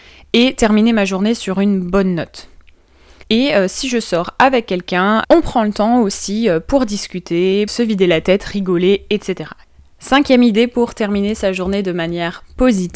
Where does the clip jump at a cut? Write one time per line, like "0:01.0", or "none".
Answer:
0:03.2
0:07.7